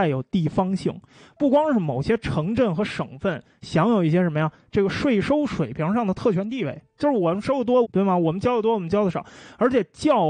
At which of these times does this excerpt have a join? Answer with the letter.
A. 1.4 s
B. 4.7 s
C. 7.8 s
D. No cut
C